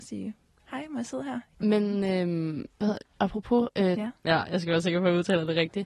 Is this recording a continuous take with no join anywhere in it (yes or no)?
no